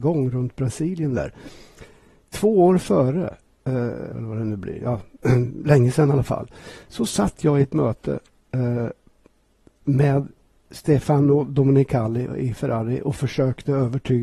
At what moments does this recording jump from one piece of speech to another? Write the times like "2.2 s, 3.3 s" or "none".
4.1 s